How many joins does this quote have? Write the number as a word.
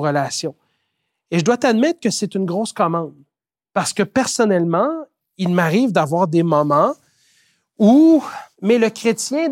one